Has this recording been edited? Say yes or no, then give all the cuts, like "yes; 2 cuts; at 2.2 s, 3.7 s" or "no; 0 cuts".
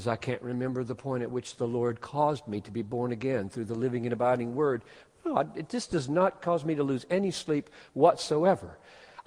no; 0 cuts